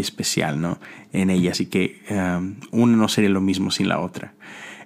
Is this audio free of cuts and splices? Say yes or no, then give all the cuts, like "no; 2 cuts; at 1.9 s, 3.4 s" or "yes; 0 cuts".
yes; 0 cuts